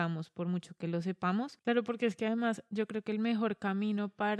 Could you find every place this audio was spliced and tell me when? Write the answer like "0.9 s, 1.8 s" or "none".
1.6 s